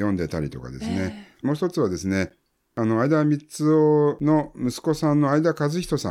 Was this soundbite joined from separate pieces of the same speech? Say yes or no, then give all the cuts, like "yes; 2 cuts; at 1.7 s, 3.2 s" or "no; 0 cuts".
no; 0 cuts